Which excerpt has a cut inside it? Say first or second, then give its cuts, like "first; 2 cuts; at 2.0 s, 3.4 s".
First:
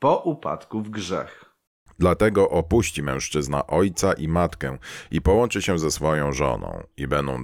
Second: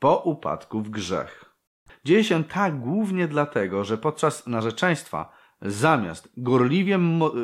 second; 1 cut; at 1.9 s